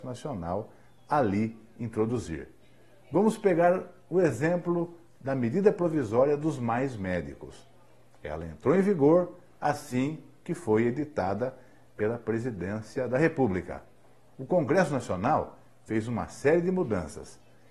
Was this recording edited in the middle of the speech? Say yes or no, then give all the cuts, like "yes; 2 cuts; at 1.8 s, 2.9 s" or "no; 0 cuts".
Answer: no; 0 cuts